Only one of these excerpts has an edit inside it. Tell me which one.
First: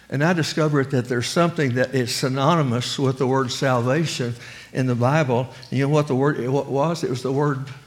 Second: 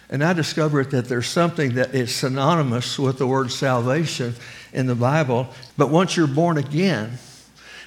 second; 1 cut; at 5.7 s

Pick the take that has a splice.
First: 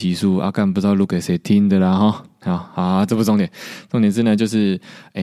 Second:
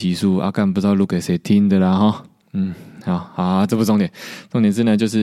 first; 1 cut; at 2.4 s

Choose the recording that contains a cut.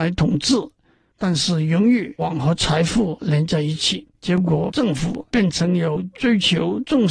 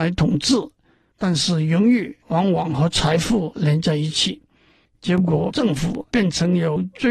first; 2 cuts; at 2.2 s, 4.1 s

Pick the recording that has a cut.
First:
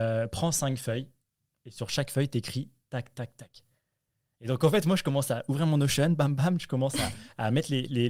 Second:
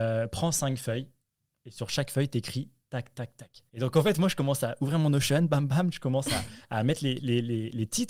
second; 1 cut; at 3.7 s

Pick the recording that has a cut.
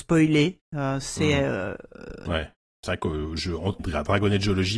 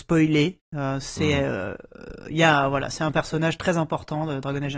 first; 2 cuts; at 2.3 s, 3.8 s

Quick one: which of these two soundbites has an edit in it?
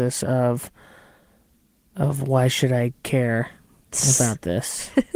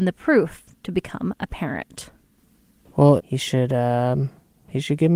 second; 1 cut; at 3.2 s

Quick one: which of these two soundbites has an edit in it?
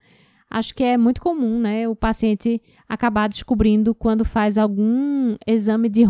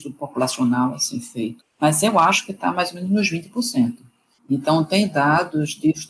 second; 2 cuts; at 1.6 s, 4.4 s

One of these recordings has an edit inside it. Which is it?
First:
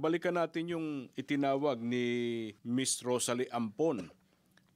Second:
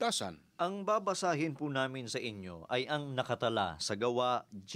first; 1 cut; at 2.6 s

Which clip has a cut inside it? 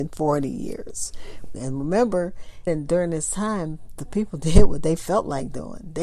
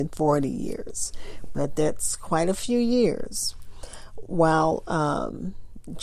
first; 2 cuts; at 1.5 s, 2.7 s

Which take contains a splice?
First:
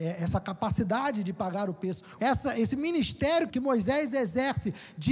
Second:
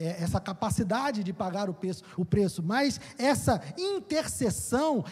first; 2 cuts; at 2.2 s, 3.5 s

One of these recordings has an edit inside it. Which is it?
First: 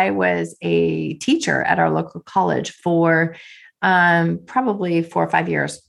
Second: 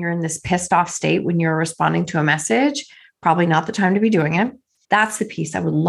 second; 1 cut; at 4.8 s

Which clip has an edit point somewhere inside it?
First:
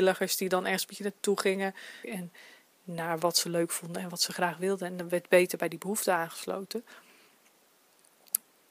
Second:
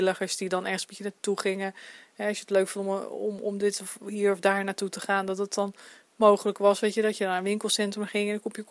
first; 1 cut; at 2.0 s

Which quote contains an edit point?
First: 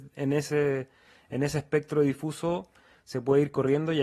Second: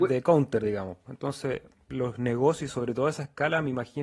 second; 1 cut; at 1.1 s

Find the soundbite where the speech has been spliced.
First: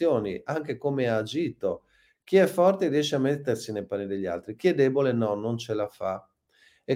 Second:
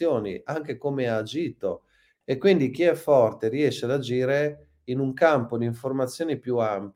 second; 1 cut; at 2.2 s

